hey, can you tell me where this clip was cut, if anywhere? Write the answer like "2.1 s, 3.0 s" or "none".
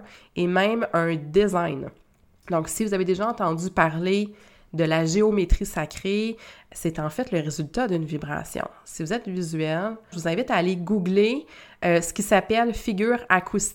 10.1 s